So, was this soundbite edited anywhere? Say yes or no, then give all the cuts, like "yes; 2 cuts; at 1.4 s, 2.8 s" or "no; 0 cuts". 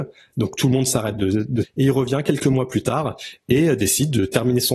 yes; 1 cut; at 1.6 s